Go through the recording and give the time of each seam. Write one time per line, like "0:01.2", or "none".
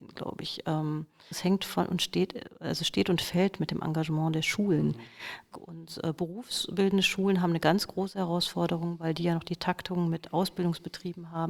0:01.3
0:05.5